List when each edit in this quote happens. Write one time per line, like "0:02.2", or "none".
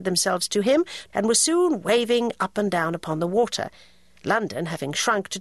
0:01.1